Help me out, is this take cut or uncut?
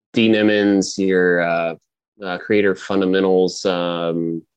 uncut